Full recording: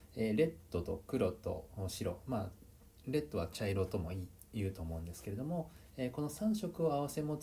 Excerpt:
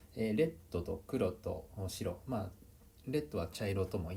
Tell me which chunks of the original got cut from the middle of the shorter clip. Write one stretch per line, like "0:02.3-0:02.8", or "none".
none